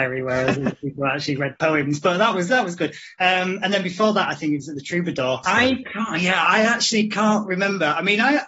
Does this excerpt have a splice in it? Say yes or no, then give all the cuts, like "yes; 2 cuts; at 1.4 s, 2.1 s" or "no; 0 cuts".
yes; 1 cut; at 5.4 s